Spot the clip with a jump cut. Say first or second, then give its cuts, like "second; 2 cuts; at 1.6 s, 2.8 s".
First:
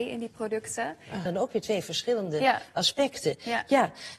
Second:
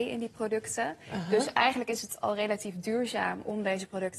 first; 1 cut; at 1.3 s